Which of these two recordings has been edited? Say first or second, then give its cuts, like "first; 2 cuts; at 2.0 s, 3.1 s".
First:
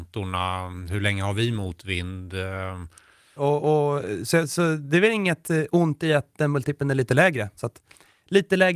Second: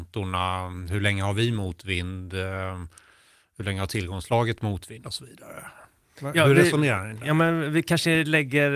first; 2 cuts; at 3.4 s, 7.6 s